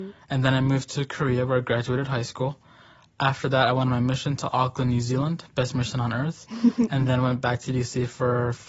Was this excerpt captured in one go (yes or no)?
yes